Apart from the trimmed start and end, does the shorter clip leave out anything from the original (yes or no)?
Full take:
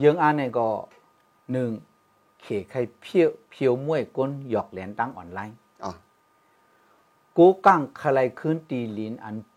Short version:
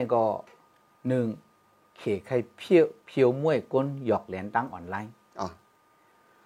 no